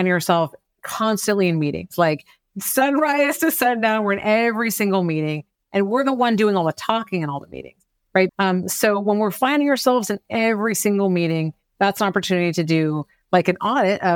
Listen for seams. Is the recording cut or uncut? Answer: cut